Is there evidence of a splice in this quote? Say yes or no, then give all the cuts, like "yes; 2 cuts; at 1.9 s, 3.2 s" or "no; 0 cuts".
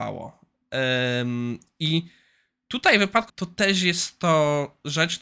yes; 1 cut; at 3.3 s